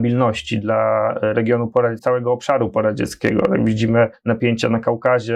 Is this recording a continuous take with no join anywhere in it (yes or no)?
no